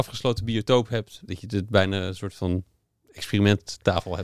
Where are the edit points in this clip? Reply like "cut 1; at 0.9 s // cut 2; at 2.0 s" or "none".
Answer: cut 1; at 1.3 s

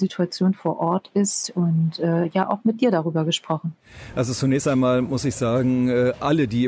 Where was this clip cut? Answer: none

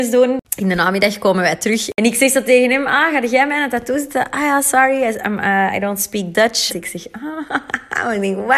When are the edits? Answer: cut 1; at 6.7 s

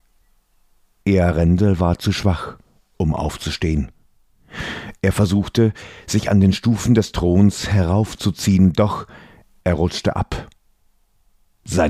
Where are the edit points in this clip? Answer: none

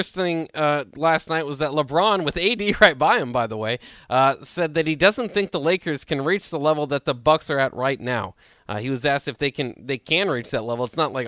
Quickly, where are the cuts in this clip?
none

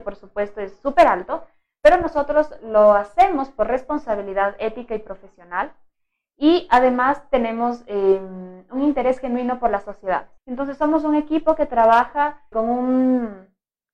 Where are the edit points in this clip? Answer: cut 1; at 10.4 s // cut 2; at 12.5 s

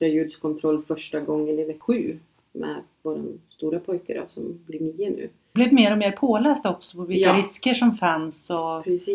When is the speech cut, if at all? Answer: cut 1; at 5.6 s

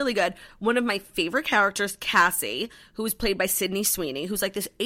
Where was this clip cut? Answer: none

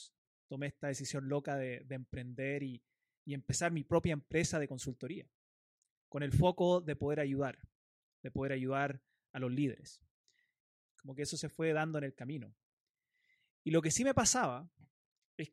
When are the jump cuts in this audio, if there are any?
cut 1; at 10.8 s

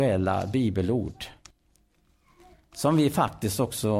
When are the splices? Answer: none

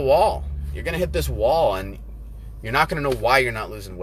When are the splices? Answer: none

